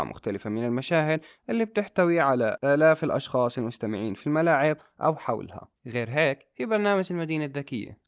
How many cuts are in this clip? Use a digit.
1